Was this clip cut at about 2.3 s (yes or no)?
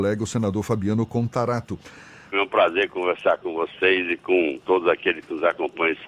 yes